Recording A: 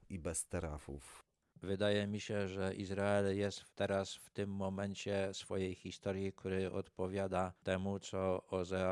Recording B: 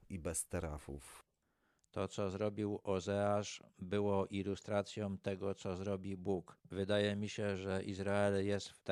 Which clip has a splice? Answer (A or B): A